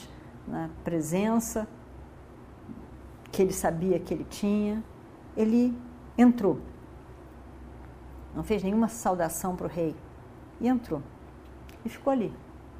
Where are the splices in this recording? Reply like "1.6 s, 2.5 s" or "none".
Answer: none